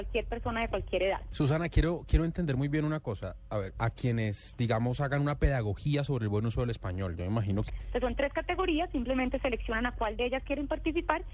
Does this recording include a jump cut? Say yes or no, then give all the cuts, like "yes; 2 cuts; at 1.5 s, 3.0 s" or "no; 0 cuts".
yes; 3 cuts; at 1.3 s, 3.7 s, 7.7 s